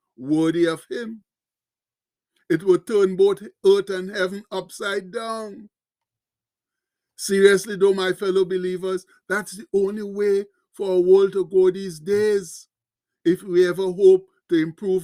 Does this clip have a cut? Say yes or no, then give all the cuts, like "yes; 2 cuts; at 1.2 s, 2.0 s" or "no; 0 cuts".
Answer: no; 0 cuts